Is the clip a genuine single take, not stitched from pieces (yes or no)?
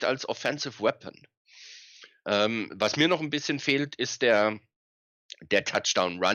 yes